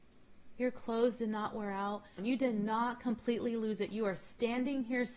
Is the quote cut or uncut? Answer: cut